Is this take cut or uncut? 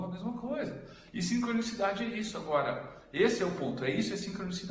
uncut